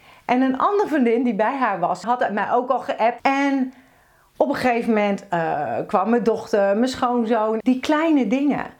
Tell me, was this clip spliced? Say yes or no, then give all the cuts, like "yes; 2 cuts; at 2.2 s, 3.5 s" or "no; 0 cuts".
yes; 3 cuts; at 2.0 s, 3.2 s, 7.6 s